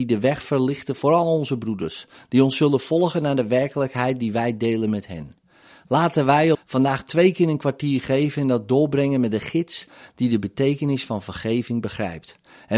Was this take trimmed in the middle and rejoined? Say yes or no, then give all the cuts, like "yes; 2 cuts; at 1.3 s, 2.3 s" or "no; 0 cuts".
yes; 1 cut; at 6.5 s